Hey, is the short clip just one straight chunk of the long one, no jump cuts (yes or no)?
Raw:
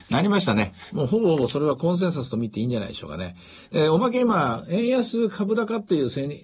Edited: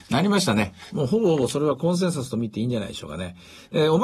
yes